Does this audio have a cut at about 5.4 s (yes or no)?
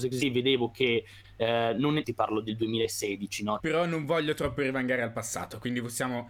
no